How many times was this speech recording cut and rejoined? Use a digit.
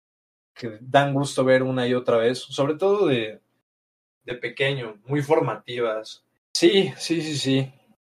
1